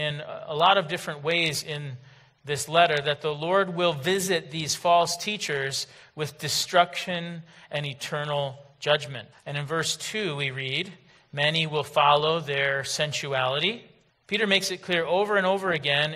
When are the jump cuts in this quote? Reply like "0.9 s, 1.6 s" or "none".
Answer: 9.3 s, 14.1 s